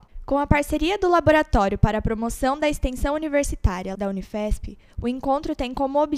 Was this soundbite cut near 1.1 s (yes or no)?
no